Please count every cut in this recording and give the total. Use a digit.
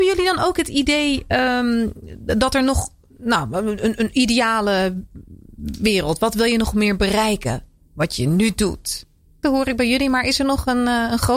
1